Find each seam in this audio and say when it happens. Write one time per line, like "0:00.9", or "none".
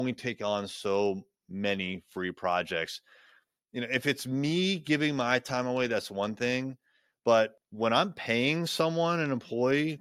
none